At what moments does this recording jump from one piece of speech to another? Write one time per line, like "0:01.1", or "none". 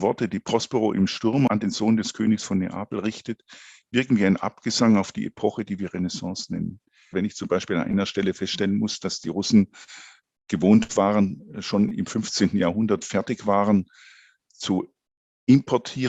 0:07.1